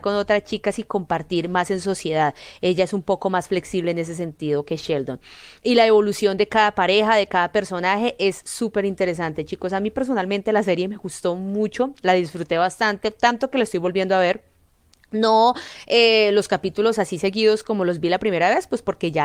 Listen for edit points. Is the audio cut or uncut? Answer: uncut